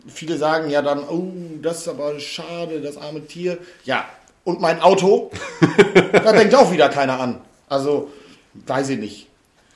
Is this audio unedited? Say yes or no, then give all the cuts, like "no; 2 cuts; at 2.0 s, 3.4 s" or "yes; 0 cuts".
yes; 0 cuts